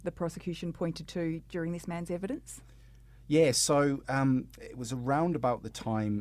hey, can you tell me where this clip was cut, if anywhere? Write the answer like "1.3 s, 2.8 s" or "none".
none